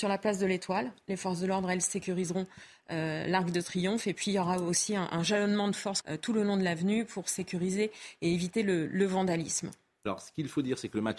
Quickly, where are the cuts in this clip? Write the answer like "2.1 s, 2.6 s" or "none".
6.0 s